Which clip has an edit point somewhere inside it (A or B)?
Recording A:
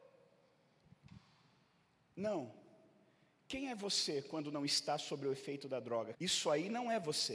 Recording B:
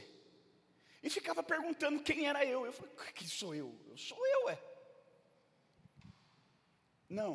A